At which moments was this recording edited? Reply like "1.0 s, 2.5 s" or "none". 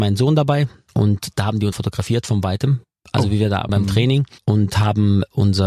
1.7 s, 3.7 s